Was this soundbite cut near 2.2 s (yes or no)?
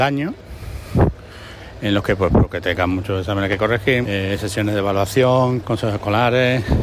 no